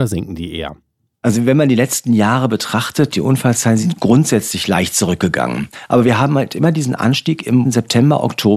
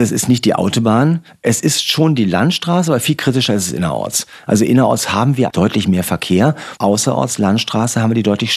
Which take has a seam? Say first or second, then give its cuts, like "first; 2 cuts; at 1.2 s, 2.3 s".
second; 2 cuts; at 5.5 s, 6.8 s